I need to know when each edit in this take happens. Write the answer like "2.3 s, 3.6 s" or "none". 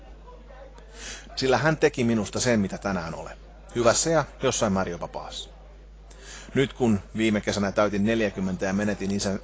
1.3 s